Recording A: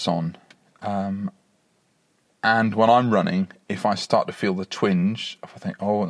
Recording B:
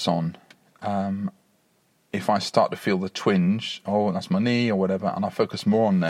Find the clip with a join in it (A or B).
B